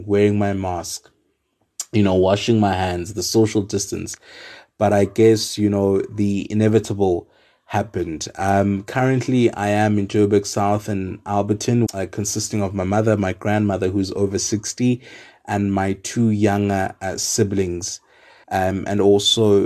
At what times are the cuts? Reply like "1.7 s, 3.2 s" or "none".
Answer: 11.9 s, 18.4 s